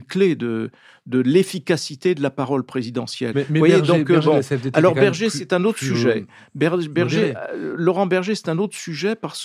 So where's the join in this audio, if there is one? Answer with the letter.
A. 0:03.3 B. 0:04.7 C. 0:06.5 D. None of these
A